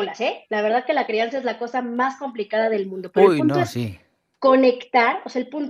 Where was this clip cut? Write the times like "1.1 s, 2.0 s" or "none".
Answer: none